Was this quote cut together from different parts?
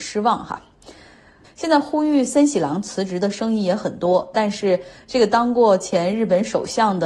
yes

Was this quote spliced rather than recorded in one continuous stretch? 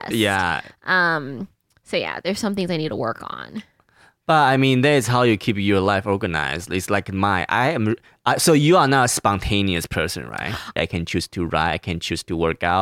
yes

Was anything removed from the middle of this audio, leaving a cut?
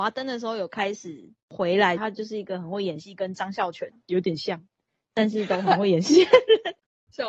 yes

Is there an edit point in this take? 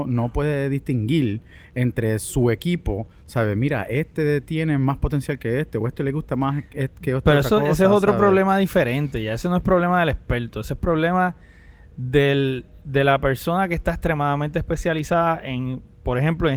no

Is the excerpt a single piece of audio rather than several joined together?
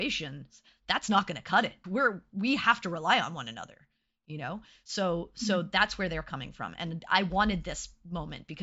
no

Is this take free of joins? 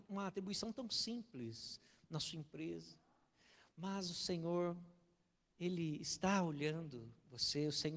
yes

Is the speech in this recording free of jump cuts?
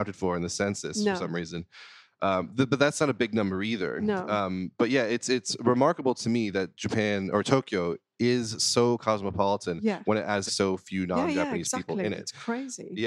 no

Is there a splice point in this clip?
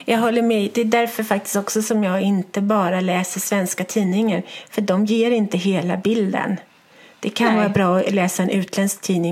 no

